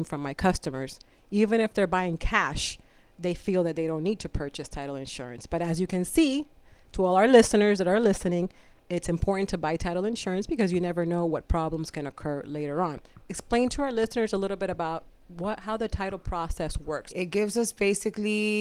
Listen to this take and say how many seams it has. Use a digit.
2